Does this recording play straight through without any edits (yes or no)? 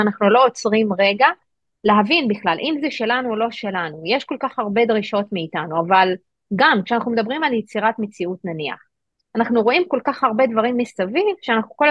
yes